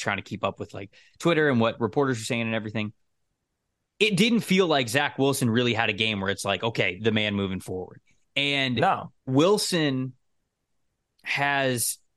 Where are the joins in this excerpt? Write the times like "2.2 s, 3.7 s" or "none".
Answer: 7.0 s, 9.2 s

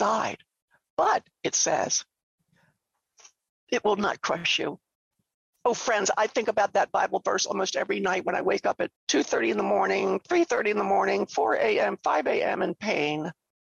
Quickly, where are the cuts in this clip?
9.0 s

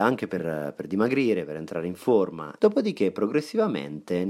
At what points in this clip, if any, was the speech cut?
2.6 s

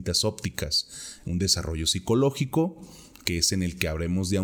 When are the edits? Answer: none

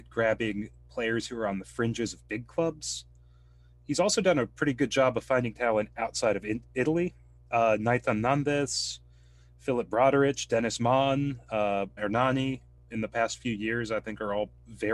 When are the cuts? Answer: 12.0 s

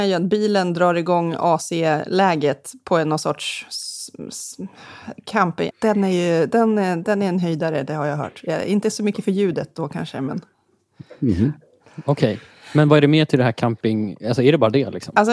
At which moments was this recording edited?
5.7 s

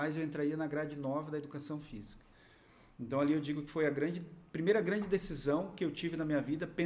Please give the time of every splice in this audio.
none

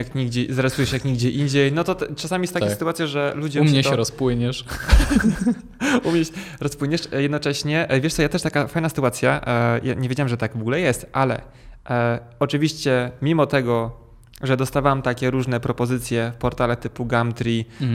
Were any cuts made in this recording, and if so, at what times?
none

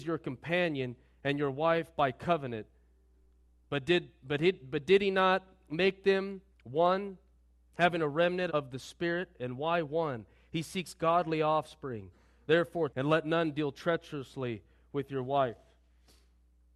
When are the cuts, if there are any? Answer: 8.5 s, 12.9 s

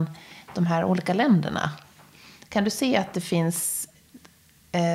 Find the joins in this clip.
none

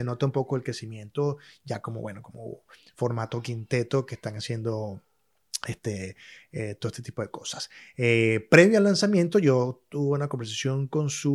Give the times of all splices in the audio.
none

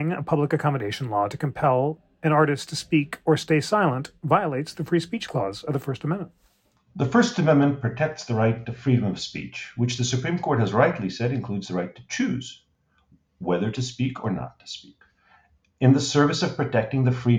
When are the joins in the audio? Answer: none

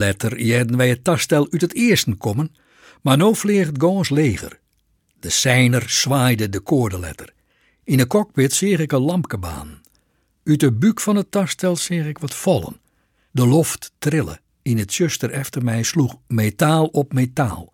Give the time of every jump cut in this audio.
13.3 s, 14.5 s

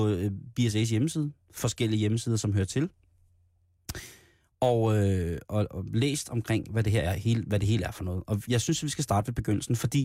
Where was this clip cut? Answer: none

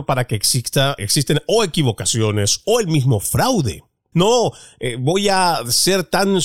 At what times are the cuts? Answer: 1.0 s, 2.6 s, 4.1 s

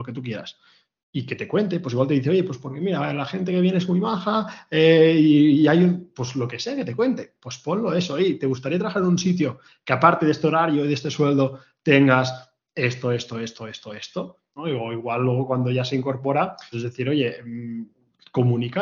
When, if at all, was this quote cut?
14.6 s, 16.7 s

